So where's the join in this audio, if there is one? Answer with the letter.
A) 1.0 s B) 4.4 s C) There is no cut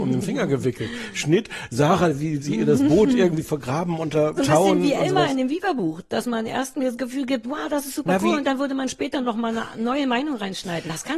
B